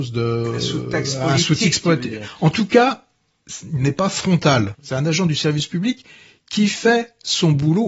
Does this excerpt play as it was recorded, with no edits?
no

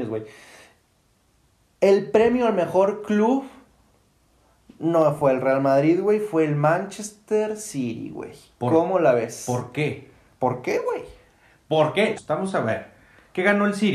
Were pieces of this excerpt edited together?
yes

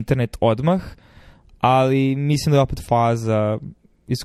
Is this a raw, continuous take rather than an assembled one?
yes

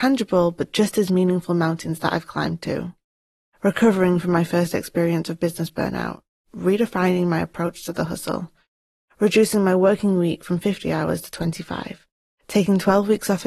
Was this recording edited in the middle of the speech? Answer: no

